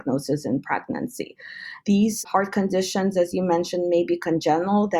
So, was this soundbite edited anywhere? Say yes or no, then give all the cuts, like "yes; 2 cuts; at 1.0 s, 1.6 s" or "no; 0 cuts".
yes; 1 cut; at 1.8 s